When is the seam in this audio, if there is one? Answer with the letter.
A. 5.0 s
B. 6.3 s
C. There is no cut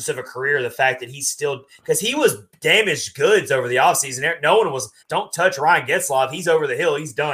A